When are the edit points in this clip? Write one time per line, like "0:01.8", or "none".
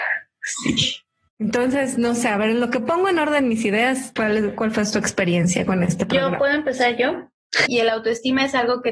0:04.2
0:07.7